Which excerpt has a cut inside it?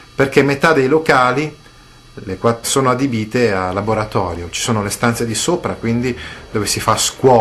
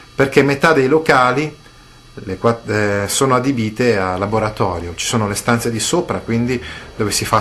first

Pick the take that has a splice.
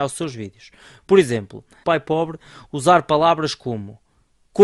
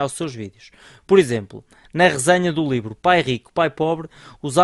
first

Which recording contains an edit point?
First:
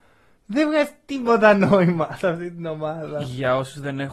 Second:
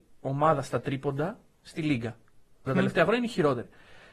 second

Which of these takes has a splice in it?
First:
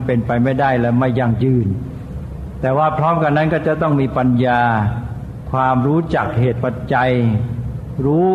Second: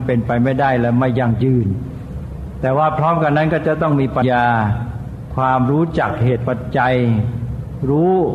second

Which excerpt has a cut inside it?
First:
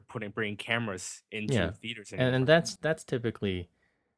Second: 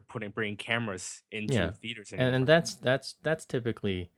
first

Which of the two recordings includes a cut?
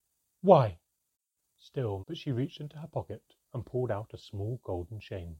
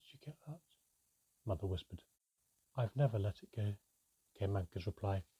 first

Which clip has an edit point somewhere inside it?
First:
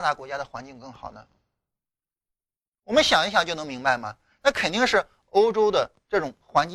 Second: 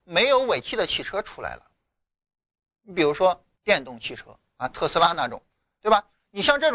second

